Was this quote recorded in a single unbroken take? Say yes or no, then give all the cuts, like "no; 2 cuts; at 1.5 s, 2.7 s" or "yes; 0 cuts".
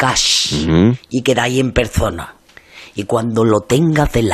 yes; 0 cuts